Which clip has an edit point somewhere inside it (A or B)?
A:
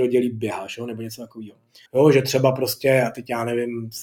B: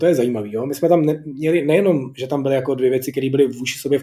A